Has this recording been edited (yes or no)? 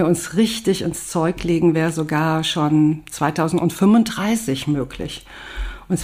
no